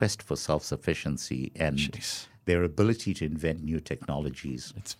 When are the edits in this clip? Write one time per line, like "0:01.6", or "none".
none

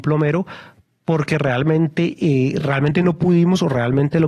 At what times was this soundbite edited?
none

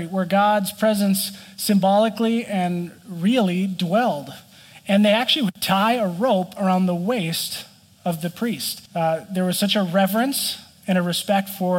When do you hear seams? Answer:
0:08.9

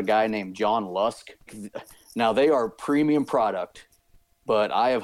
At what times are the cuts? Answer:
0:01.5

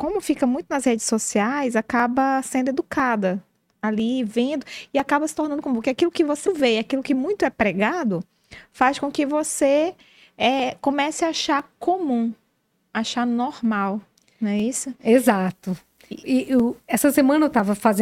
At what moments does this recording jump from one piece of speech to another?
0:06.5

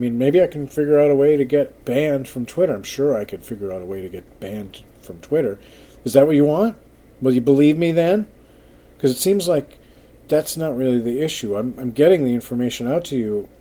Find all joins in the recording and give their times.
none

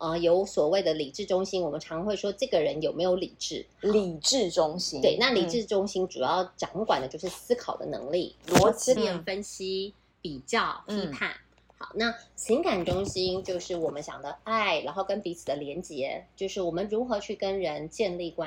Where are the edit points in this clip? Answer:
0:09.0

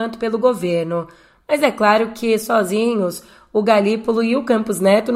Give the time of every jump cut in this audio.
none

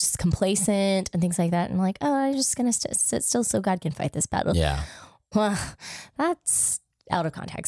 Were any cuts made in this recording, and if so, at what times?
0:05.3

